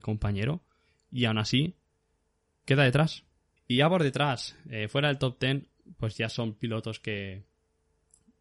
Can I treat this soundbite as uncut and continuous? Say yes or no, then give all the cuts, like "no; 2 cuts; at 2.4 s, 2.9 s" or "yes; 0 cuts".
no; 1 cut; at 3.6 s